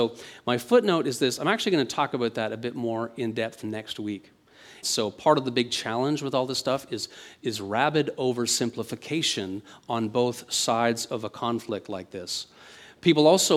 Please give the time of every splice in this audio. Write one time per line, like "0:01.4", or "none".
0:04.8